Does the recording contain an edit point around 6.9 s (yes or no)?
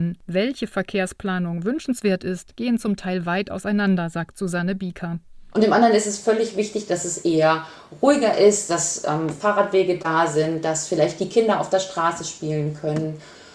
no